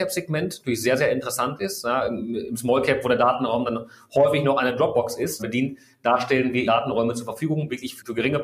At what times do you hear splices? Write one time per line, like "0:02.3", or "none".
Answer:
0:05.4
0:06.6